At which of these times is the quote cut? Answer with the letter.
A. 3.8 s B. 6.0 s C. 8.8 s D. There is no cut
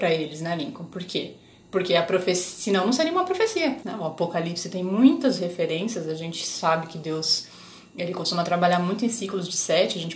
A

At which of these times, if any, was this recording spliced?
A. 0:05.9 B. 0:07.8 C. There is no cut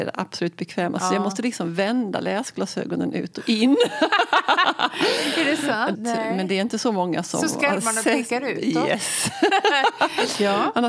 A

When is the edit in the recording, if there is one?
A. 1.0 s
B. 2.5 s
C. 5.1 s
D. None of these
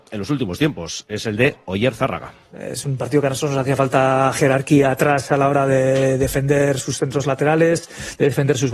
B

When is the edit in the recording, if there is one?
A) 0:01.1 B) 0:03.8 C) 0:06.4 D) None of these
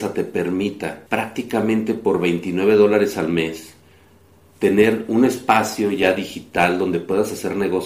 A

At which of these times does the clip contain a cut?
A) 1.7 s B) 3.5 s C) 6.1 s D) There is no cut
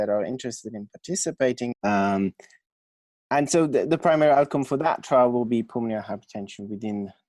A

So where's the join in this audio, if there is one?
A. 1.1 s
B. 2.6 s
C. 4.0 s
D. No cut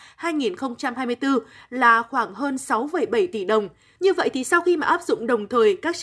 C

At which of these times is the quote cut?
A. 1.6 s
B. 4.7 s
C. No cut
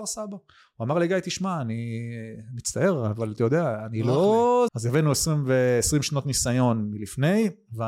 B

